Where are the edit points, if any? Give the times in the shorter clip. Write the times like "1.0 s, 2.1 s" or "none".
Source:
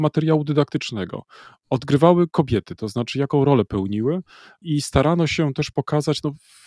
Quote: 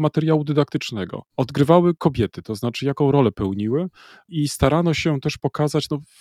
1.3 s